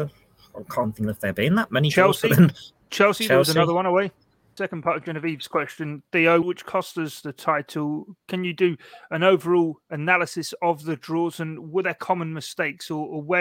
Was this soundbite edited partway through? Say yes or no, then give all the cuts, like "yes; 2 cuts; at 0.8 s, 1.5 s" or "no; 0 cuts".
yes; 2 cuts; at 4.6 s, 6.4 s